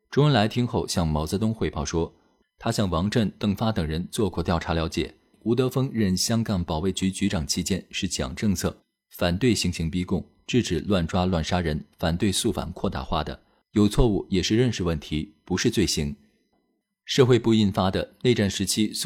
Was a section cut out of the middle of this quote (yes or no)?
yes